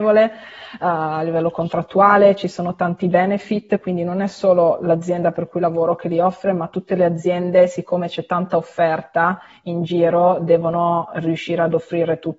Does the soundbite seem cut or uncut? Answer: uncut